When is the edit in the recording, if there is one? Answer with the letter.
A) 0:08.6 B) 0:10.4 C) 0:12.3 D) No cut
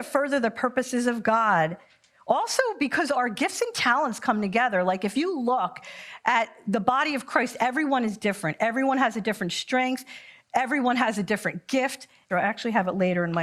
C